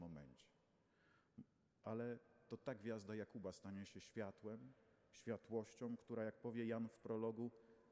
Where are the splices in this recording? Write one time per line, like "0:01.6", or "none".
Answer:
none